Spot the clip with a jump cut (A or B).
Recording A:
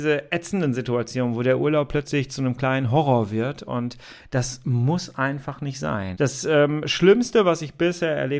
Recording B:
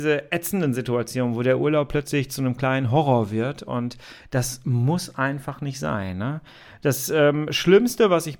A